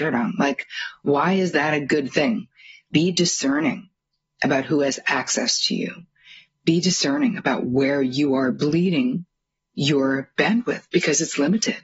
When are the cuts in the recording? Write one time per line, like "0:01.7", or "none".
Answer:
none